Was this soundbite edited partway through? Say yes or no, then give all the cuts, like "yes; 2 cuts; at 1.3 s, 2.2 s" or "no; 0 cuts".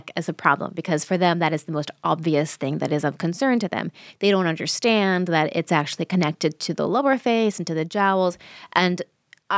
no; 0 cuts